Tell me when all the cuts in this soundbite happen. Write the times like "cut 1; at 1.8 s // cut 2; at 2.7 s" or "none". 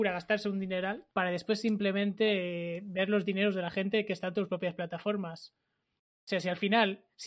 cut 1; at 1.1 s